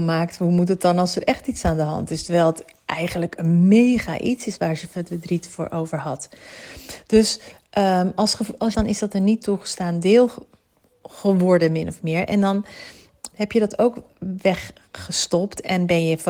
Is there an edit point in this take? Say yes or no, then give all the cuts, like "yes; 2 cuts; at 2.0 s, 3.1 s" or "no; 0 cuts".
yes; 2 cuts; at 8.7 s, 13.3 s